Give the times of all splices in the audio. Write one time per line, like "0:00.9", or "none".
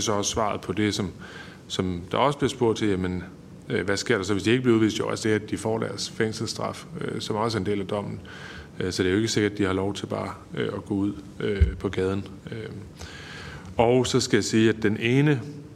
0:05.2